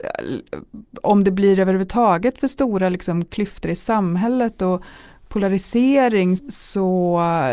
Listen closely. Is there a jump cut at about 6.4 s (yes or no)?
yes